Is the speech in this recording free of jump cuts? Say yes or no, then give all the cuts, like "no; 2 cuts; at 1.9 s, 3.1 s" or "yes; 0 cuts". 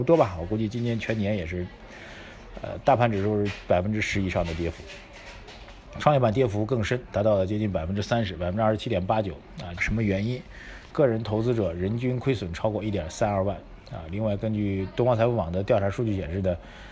no; 2 cuts; at 9.8 s, 10.9 s